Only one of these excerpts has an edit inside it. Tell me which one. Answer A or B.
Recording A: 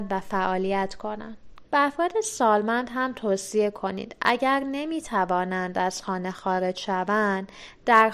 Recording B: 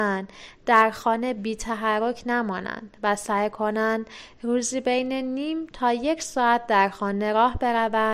A